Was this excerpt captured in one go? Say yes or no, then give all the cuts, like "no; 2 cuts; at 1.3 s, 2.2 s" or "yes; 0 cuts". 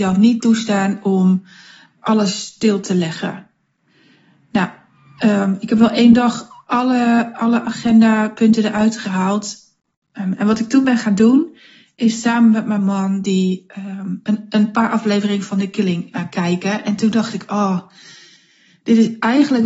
yes; 0 cuts